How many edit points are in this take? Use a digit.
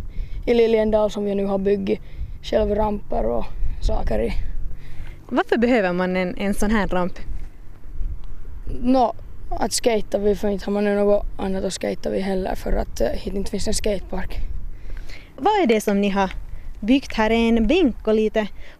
0